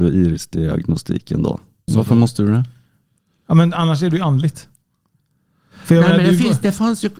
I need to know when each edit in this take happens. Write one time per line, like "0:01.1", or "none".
0:01.9